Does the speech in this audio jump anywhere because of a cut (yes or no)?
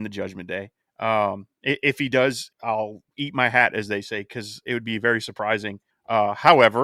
yes